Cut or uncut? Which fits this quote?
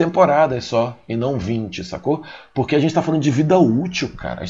uncut